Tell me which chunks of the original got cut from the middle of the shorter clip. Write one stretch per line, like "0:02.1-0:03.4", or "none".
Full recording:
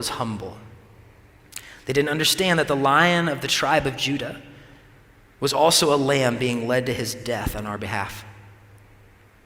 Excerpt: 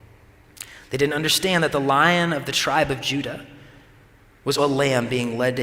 0:05.5-0:05.9